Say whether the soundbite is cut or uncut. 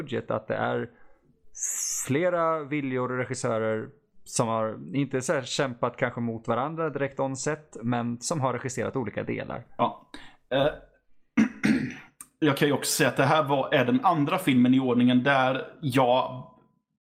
uncut